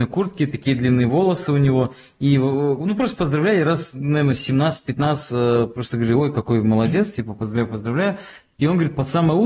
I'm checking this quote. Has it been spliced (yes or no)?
no